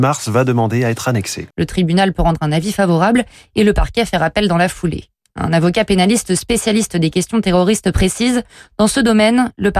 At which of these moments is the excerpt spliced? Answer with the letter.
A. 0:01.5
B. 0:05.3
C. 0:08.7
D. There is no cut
A